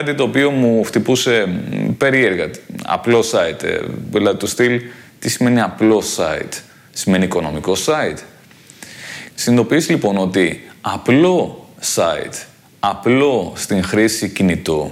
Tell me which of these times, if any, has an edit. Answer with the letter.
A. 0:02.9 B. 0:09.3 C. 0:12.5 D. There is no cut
B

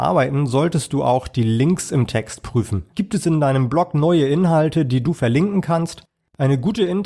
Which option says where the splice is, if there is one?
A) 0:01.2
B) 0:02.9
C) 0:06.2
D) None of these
B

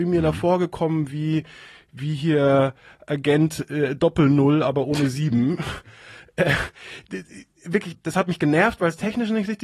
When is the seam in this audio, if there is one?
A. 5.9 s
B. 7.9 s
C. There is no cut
B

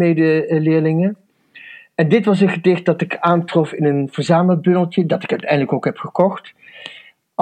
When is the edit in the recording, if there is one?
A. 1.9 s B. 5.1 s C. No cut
C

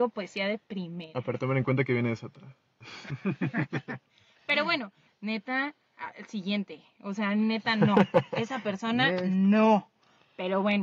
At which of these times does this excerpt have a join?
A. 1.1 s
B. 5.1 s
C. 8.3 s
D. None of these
B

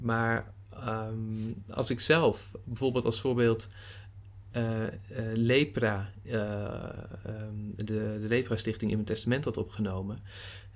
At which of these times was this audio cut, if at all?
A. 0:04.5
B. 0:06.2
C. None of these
C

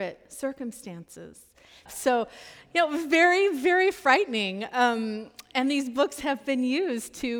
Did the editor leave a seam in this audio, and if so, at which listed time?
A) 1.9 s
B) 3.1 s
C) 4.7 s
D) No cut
A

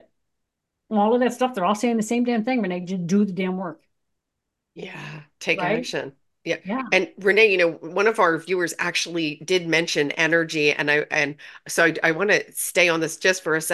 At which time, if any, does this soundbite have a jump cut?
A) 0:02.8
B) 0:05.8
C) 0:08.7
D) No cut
D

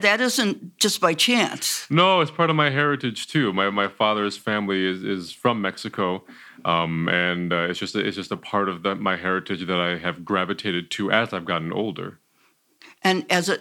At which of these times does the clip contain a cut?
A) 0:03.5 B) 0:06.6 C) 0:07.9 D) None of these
D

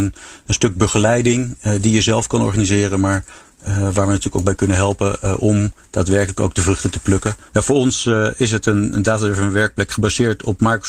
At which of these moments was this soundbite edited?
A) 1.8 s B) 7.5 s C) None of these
B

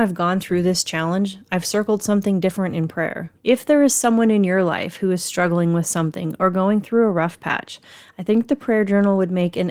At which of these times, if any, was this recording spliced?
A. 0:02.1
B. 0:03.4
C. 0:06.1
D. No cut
B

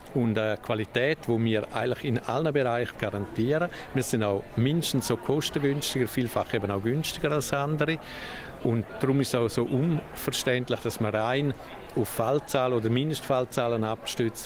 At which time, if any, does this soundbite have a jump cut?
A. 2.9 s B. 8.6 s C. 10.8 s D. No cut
A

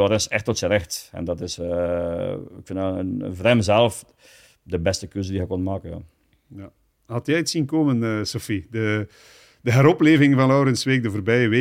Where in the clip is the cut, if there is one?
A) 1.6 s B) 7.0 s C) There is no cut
C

